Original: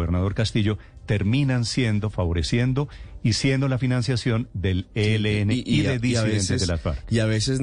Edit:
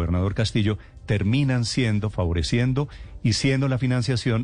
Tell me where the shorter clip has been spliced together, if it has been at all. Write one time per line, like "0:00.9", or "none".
none